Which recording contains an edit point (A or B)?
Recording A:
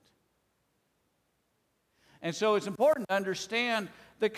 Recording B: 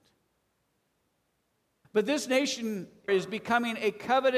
B